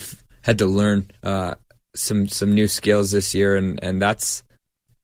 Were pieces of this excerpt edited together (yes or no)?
yes